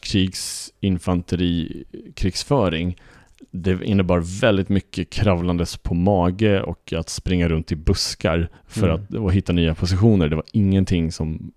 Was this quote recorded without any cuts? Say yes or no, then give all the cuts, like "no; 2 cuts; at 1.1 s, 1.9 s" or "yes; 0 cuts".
no; 1 cut; at 8.6 s